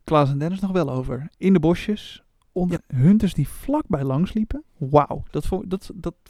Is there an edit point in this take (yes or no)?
yes